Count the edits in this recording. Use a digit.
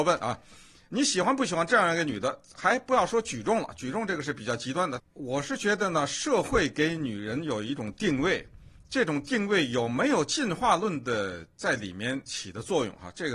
1